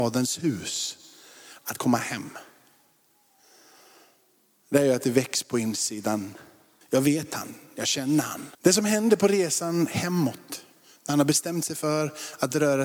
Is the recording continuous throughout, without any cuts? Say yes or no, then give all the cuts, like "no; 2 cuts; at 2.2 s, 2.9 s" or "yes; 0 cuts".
no; 2 cuts; at 6.8 s, 8.5 s